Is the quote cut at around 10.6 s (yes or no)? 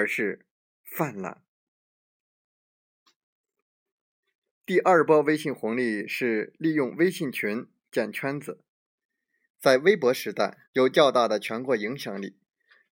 yes